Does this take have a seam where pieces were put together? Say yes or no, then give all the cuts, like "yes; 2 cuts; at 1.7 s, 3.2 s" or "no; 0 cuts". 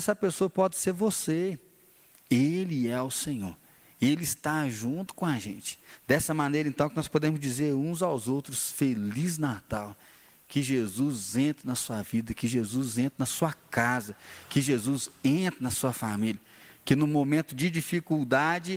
yes; 1 cut; at 2.1 s